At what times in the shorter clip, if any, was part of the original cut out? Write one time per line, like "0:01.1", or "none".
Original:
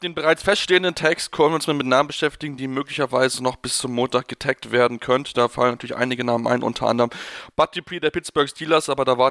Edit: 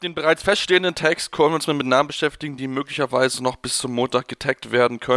none